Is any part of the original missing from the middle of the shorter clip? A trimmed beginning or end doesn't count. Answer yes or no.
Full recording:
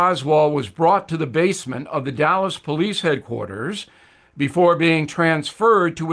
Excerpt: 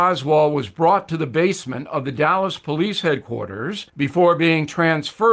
yes